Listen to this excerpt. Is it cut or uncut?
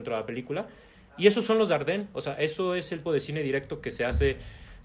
cut